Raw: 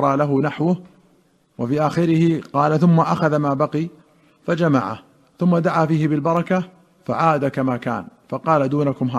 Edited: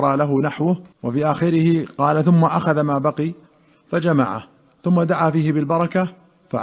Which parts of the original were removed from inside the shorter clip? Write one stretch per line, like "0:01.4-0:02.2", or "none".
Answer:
0:00.9-0:01.5